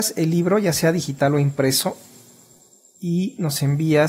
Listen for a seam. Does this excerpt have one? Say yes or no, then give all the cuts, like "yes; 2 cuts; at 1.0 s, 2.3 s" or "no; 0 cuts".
no; 0 cuts